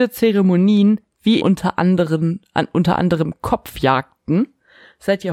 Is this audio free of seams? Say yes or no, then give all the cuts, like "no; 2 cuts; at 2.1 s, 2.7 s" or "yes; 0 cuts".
no; 1 cut; at 1.4 s